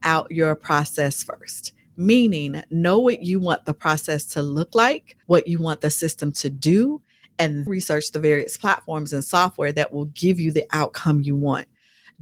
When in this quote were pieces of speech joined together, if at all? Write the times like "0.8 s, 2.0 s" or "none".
5.2 s, 7.7 s